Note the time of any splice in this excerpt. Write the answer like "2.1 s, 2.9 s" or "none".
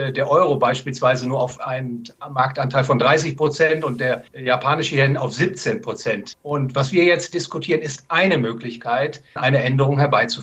4.3 s, 6.3 s, 9.4 s